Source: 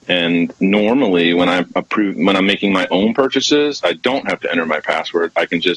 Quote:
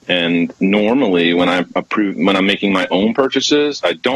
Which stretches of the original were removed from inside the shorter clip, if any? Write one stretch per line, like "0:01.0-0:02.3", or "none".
none